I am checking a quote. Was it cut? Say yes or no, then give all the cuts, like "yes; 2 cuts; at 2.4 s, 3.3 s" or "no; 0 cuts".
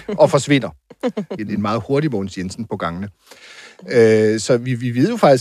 yes; 1 cut; at 1.4 s